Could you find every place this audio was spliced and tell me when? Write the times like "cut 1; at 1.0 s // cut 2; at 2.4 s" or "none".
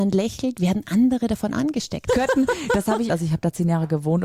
cut 1; at 2.1 s // cut 2; at 3.1 s